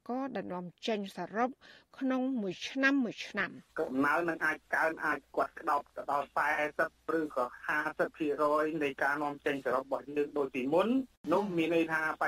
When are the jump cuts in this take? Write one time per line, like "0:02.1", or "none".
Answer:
0:03.7